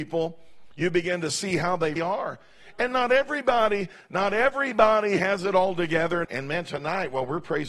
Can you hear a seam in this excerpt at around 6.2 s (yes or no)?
yes